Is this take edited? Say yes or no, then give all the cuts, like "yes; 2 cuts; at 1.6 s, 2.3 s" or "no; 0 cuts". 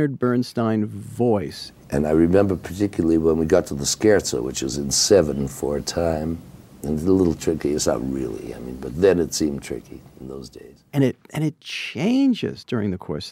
no; 0 cuts